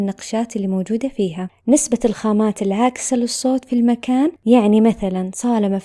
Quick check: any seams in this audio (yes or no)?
yes